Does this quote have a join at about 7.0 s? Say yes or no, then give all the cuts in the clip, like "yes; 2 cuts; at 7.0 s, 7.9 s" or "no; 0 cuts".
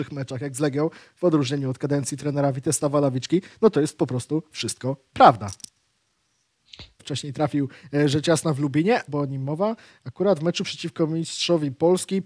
yes; 2 cuts; at 7.0 s, 9.1 s